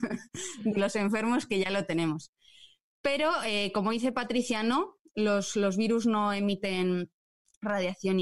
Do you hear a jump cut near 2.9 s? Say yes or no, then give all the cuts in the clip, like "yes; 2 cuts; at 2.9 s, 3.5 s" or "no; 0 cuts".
no; 0 cuts